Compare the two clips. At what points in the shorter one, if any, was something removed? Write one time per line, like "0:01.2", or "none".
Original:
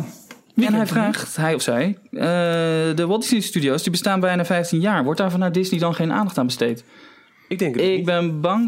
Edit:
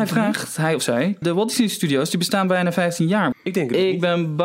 0:01.2
0:03.3